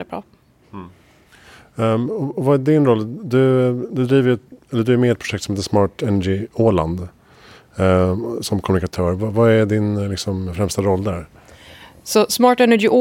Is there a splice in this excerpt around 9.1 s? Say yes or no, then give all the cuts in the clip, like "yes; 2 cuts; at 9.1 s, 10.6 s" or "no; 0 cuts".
no; 0 cuts